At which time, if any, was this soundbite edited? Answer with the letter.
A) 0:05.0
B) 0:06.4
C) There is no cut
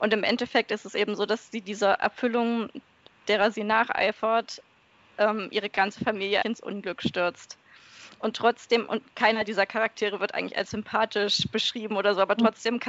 B